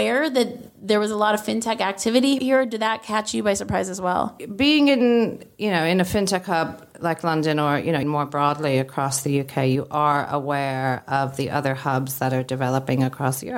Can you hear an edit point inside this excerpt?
yes; 1 cut; at 8.0 s

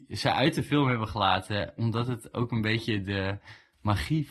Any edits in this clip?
no; 0 cuts

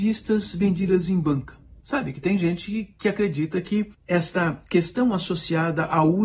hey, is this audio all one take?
no; 1 cut; at 1.8 s

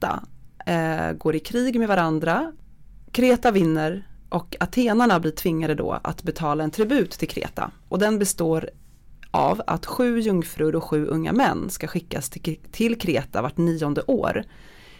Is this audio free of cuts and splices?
yes; 0 cuts

